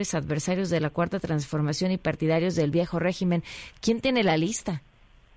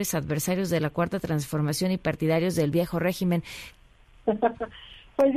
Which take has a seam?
second; 1 cut; at 3.7 s

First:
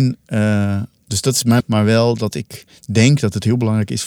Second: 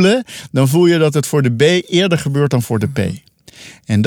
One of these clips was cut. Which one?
first; 1 cut; at 1.6 s

